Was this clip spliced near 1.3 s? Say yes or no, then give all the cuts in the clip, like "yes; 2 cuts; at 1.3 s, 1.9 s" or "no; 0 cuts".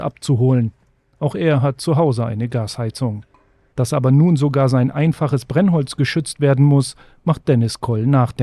no; 1 cut; at 3.7 s